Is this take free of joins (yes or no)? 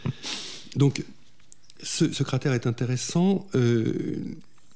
no